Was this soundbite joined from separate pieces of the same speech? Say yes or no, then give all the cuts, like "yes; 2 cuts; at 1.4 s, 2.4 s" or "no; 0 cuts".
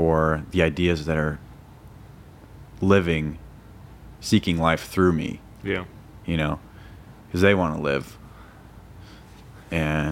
no; 0 cuts